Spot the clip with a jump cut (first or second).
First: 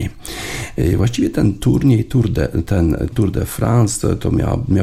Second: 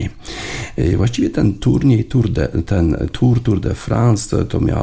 first